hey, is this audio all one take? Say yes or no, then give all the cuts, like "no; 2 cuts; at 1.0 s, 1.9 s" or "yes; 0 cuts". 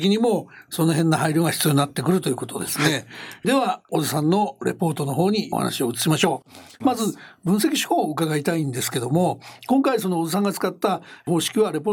yes; 0 cuts